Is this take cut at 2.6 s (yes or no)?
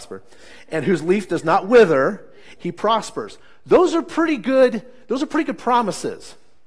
yes